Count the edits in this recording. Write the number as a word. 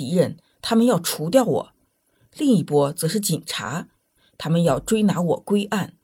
zero